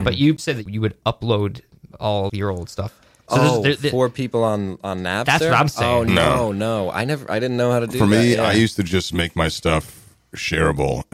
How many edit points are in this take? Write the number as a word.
one